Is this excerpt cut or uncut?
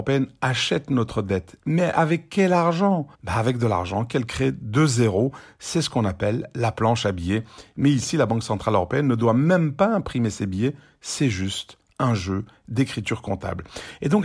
cut